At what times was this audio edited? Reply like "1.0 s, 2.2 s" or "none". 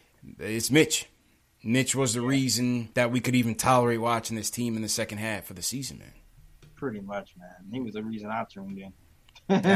2.9 s